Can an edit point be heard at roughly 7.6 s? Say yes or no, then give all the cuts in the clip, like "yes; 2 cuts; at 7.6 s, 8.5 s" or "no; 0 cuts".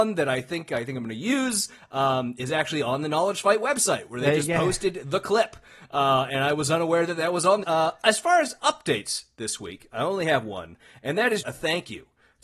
yes; 2 cuts; at 7.6 s, 11.4 s